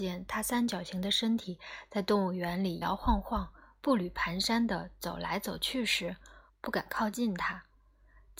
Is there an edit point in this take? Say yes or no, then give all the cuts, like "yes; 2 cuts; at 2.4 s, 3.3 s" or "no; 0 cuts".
yes; 2 cuts; at 2.8 s, 6.5 s